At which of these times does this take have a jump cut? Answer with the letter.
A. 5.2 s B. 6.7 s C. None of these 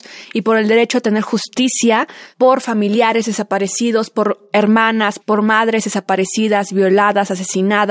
A